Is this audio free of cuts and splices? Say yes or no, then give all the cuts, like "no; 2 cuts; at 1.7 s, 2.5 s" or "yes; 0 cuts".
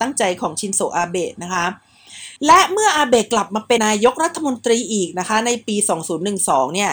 no; 2 cuts; at 2.4 s, 3.8 s